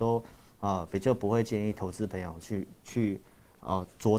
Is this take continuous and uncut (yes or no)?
yes